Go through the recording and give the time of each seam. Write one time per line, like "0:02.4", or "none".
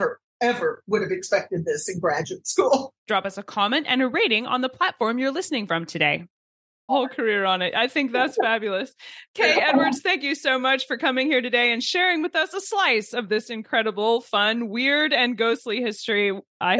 0:03.0
0:06.9